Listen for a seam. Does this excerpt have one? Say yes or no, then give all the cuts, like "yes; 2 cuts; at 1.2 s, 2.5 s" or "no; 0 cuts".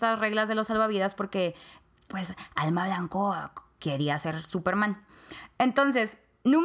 no; 0 cuts